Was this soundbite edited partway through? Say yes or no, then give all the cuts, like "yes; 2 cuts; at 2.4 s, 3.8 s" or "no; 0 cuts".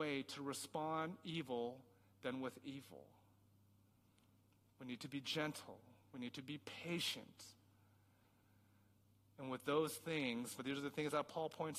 yes; 1 cut; at 10.6 s